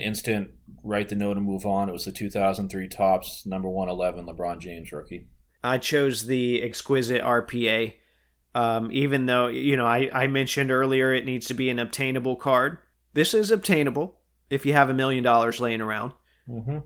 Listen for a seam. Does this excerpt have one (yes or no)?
yes